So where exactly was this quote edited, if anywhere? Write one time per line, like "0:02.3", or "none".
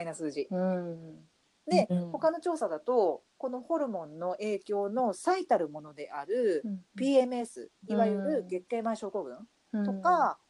none